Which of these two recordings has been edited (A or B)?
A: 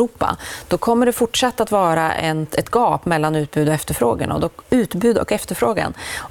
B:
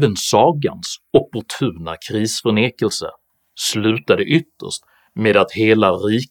A